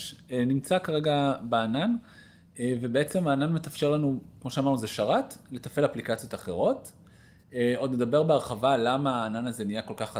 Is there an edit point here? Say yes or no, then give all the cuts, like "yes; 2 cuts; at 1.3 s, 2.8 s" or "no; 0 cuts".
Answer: no; 0 cuts